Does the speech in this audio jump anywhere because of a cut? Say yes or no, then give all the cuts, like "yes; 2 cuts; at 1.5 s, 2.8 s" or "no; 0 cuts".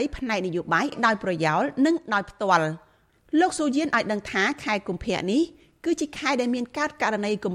no; 0 cuts